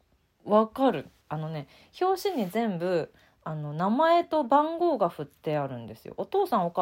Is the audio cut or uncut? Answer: cut